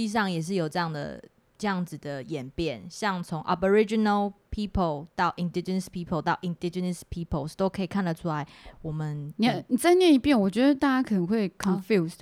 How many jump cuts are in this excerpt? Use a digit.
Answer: 0